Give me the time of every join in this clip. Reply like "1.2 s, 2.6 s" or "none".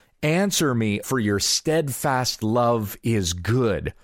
1.0 s